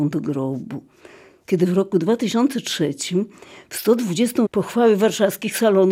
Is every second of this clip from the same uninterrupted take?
no; 1 cut; at 4.5 s

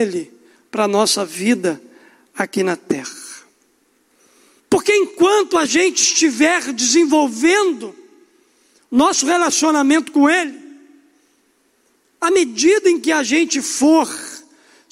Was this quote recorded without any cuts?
no; 1 cut; at 4.6 s

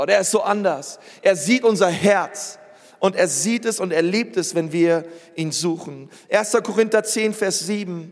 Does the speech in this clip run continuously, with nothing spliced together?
yes; 0 cuts

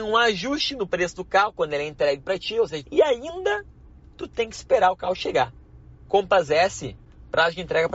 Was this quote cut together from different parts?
yes; 2 cuts; at 2.8 s, 6.1 s

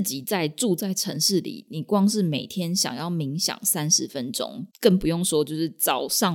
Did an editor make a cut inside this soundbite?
yes; 1 cut; at 4.7 s

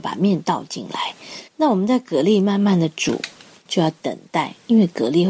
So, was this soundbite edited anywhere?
yes; 2 cuts; at 1.5 s, 3.7 s

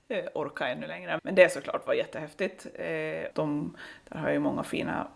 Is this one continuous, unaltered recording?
no; 2 cuts; at 1.2 s, 3.3 s

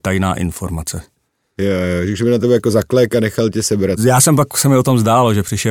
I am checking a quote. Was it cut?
no; 0 cuts

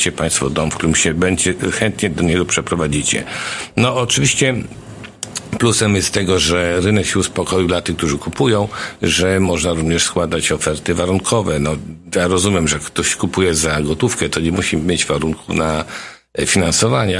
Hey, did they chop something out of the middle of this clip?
no; 0 cuts

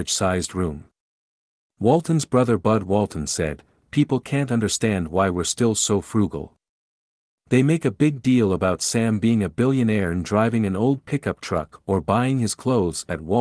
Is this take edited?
no; 0 cuts

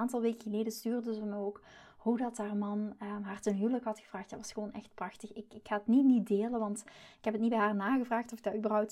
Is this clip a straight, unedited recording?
yes; 0 cuts

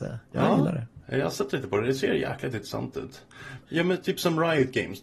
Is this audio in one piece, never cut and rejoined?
no; 1 cut; at 3.6 s

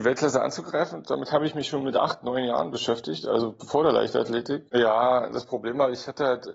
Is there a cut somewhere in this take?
yes; 1 cut; at 4.7 s

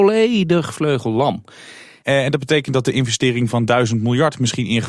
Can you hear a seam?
yes; 1 cut; at 2.0 s

